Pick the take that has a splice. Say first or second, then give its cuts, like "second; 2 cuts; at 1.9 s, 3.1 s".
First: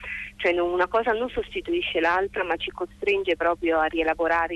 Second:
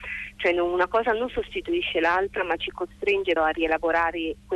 second; 1 cut; at 3.4 s